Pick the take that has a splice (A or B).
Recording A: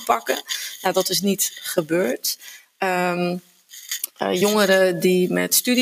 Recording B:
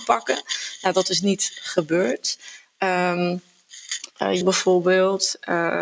B